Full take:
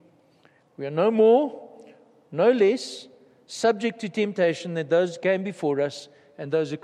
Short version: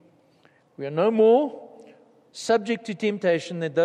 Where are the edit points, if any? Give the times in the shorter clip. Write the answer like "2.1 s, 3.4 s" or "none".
2.3 s